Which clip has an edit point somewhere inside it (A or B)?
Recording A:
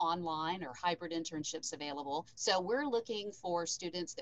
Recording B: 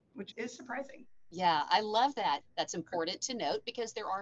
B